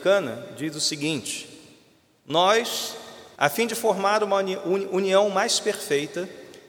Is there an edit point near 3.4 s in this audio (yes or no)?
yes